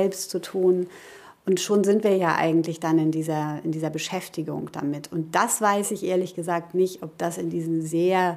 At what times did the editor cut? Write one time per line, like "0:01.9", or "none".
none

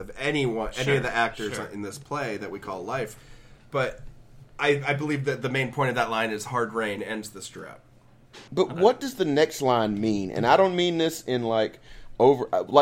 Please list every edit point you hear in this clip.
0:08.5

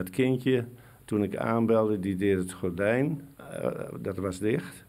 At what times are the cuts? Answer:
0:03.3

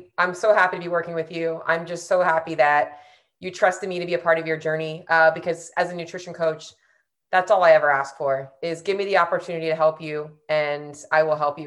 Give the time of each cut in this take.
none

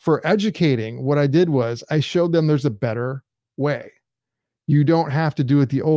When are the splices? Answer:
none

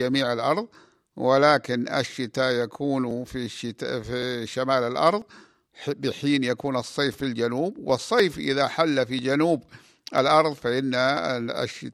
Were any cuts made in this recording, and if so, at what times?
0:03.3

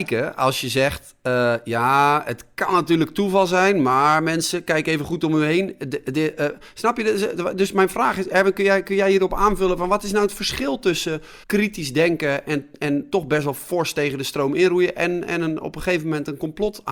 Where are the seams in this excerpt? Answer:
0:11.4

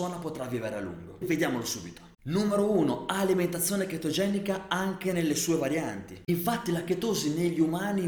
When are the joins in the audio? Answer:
0:01.2

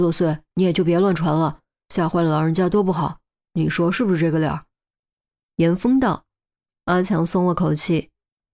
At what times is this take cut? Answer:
none

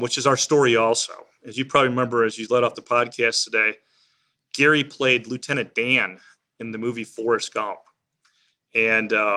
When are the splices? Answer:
none

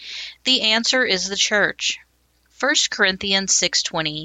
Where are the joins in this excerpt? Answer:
0:02.5

